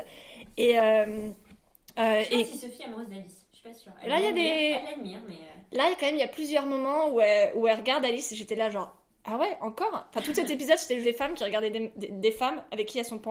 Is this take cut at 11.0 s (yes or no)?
yes